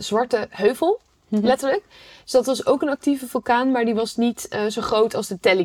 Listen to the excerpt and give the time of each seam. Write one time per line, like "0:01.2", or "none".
none